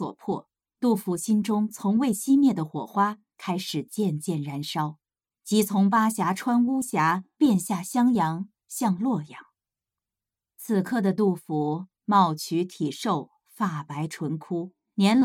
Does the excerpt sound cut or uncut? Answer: uncut